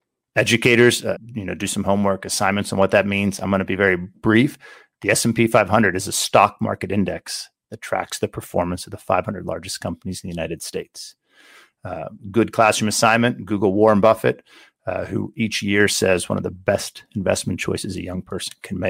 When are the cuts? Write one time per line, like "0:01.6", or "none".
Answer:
0:01.2